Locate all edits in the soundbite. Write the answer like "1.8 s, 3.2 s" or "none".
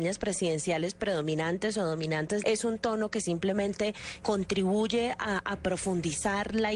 2.4 s, 4.2 s